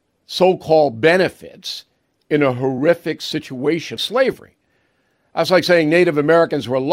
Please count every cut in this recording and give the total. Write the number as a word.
one